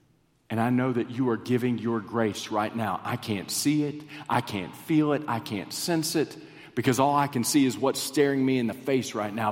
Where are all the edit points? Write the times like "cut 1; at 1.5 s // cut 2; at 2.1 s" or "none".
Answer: none